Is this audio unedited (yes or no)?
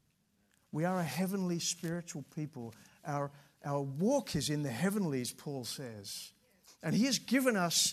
no